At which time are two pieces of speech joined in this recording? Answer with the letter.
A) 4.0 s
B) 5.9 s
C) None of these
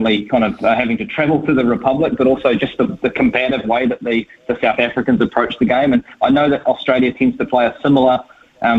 C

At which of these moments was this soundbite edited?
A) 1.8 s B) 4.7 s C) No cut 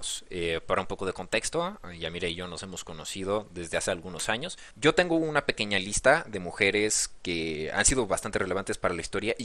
B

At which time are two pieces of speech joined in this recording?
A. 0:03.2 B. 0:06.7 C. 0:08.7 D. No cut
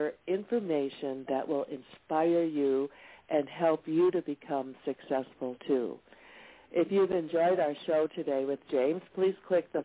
D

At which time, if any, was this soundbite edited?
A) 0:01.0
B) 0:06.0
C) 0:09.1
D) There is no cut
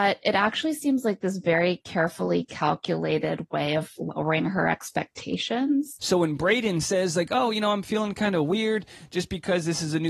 B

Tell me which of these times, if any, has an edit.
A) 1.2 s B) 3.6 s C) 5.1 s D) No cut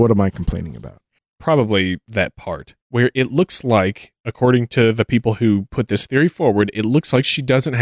A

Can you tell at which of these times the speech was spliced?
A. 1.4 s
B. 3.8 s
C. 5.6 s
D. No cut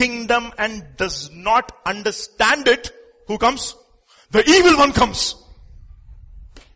D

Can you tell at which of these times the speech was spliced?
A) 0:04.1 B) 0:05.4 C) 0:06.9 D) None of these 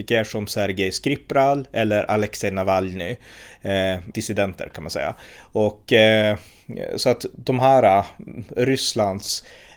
A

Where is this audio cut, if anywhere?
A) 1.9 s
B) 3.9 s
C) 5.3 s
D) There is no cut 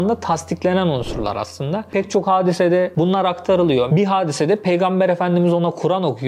B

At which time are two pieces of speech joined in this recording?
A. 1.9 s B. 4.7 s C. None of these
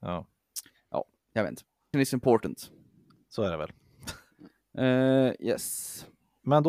A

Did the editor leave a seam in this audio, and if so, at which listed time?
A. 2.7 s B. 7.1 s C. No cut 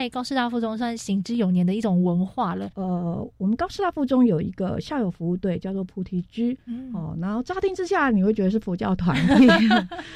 A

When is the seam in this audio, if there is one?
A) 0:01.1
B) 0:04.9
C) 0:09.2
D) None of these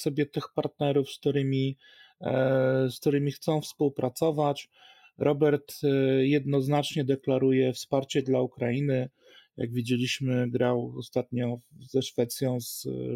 D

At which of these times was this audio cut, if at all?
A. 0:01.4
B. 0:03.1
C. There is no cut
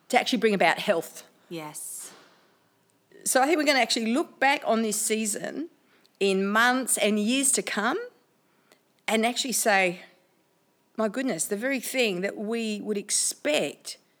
B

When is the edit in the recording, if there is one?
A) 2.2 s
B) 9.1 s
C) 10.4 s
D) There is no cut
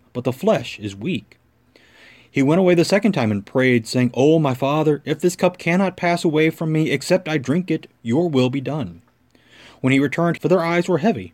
C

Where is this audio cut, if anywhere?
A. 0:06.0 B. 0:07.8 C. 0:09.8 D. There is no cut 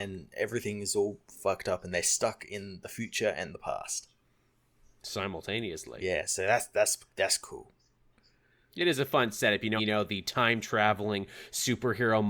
C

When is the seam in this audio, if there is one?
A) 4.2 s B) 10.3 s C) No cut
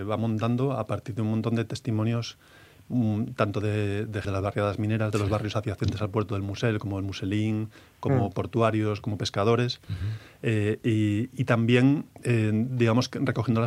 A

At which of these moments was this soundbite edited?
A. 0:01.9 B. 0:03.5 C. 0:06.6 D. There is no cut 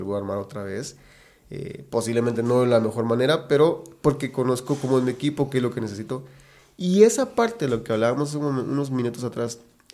D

